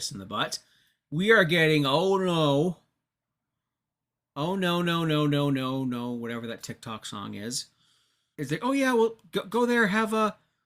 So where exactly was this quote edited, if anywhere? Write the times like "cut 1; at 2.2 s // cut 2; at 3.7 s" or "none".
cut 1; at 8.3 s